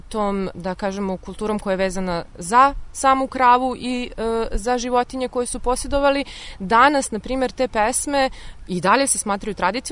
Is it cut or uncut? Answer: cut